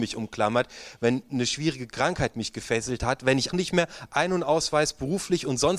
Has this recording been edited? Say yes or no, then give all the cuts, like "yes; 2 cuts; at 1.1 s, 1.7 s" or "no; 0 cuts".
yes; 1 cut; at 3.5 s